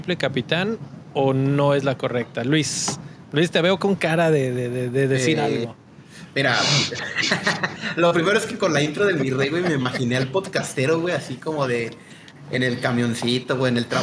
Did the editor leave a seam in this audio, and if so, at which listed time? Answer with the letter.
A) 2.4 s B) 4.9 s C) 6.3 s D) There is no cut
D